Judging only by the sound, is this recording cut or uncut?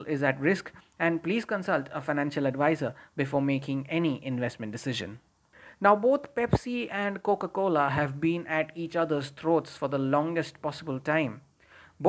uncut